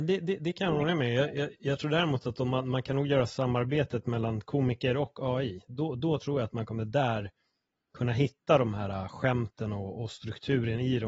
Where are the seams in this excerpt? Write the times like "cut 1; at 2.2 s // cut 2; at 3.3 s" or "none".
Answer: none